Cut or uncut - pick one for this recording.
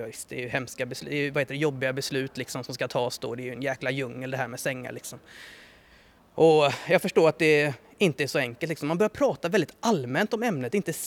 uncut